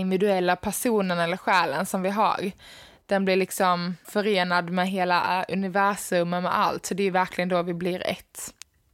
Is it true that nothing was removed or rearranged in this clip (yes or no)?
no